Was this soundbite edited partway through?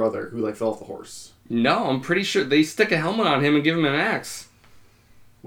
no; 0 cuts

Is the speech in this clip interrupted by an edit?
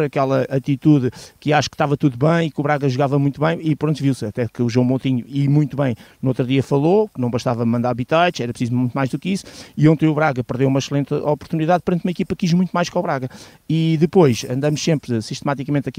no; 0 cuts

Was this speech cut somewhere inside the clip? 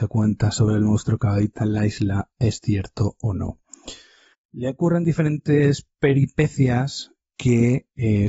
no; 0 cuts

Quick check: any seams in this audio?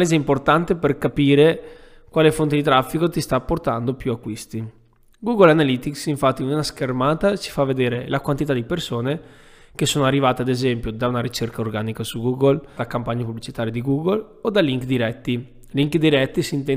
yes; 1 cut; at 12.8 s

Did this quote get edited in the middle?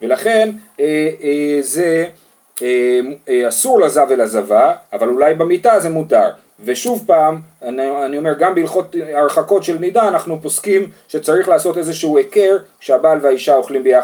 no; 0 cuts

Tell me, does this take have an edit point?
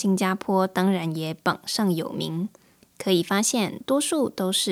no; 0 cuts

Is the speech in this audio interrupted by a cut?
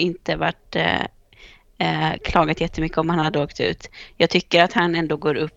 no; 0 cuts

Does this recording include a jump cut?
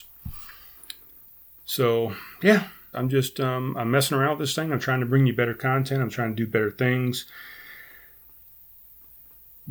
yes; 1 cut; at 2.9 s

